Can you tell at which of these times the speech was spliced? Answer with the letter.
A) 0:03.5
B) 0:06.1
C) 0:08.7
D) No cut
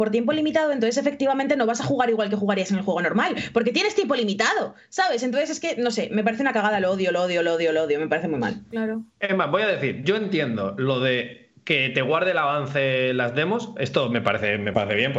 C